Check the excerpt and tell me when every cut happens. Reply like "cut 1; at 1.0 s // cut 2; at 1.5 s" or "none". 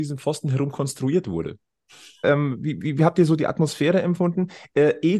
cut 1; at 2.2 s